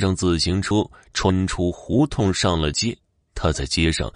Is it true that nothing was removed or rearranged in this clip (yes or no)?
yes